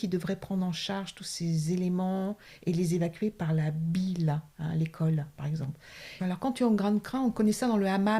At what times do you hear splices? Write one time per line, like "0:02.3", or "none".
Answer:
0:06.2